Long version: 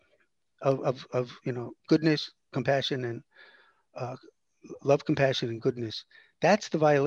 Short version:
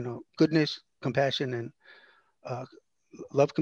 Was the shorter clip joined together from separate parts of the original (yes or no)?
no